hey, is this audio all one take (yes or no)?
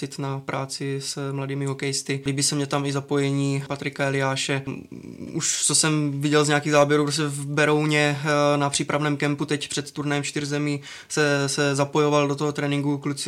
yes